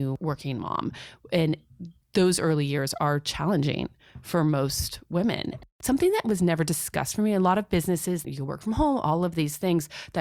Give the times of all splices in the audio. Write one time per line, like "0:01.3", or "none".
0:08.2